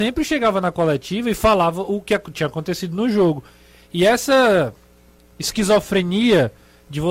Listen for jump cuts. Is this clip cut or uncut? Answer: uncut